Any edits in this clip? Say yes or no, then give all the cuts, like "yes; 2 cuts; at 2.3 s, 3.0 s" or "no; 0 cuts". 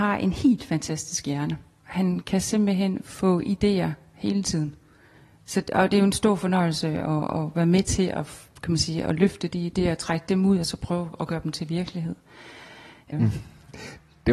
yes; 1 cut; at 13.1 s